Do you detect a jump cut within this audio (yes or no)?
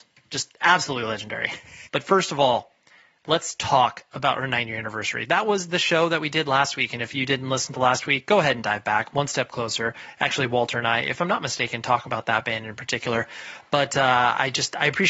yes